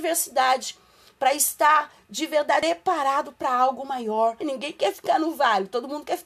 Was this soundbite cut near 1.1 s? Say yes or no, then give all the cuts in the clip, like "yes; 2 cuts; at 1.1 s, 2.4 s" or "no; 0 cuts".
no; 1 cut; at 4.4 s